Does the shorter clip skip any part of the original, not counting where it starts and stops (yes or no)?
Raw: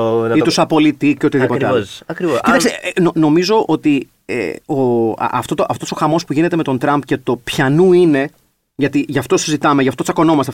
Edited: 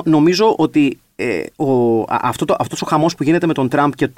no